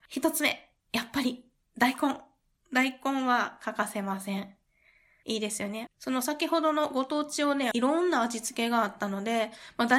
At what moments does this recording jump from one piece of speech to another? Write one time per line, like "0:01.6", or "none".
0:05.9
0:07.7